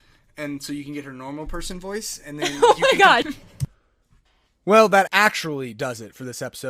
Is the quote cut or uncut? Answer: cut